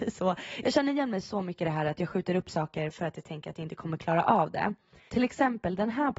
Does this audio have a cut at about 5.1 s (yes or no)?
yes